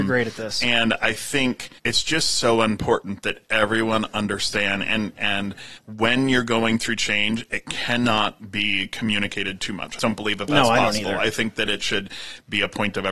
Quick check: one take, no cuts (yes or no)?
no